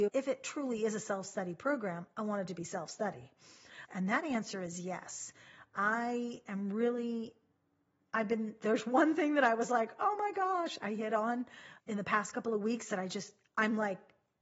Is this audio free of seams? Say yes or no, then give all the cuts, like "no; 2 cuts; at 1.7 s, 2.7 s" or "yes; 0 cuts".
no; 1 cut; at 3.9 s